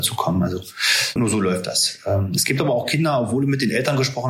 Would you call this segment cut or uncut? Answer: cut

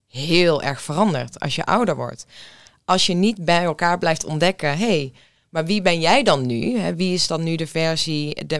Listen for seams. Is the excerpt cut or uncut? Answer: uncut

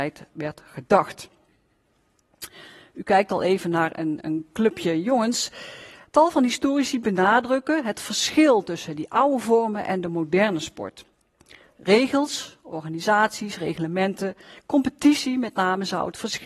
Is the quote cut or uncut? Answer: cut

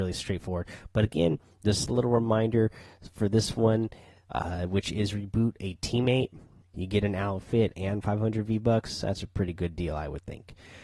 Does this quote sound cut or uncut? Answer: cut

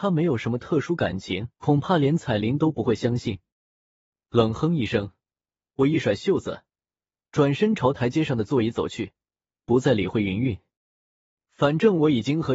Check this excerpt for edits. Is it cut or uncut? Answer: cut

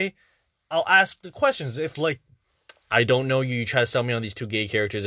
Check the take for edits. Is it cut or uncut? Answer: uncut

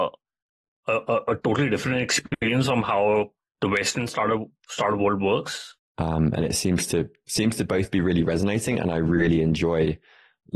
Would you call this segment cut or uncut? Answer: cut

